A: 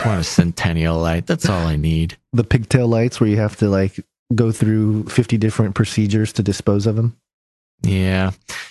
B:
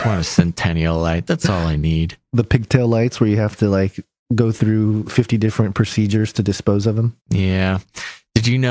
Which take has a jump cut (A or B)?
B